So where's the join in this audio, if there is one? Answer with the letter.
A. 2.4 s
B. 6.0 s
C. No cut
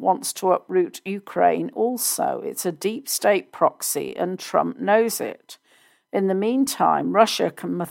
C